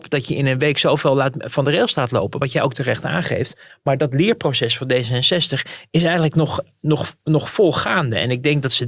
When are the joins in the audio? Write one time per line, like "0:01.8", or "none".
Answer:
none